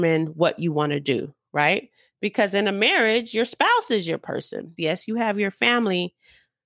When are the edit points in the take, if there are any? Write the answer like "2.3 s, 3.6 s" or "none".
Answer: 4.8 s

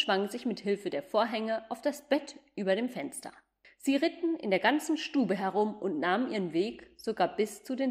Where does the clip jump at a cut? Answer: 3.6 s

